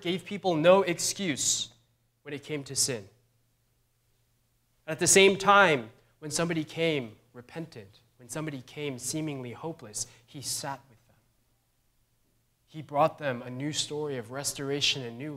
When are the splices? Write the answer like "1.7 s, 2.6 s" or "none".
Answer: none